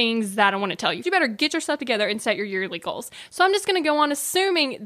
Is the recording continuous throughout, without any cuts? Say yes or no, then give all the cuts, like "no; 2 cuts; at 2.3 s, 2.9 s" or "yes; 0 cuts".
no; 1 cut; at 1.0 s